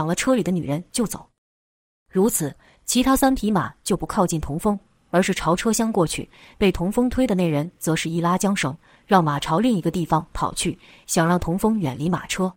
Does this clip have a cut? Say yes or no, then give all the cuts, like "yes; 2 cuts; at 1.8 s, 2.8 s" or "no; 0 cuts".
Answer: no; 0 cuts